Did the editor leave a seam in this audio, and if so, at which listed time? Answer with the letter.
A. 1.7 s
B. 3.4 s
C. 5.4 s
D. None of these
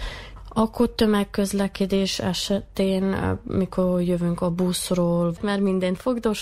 C